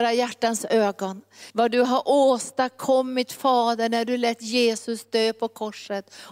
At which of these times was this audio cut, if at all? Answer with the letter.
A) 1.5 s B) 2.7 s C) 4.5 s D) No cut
A